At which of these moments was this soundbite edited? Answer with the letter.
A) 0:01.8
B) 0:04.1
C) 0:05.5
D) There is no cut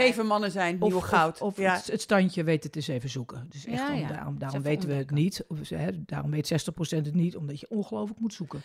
D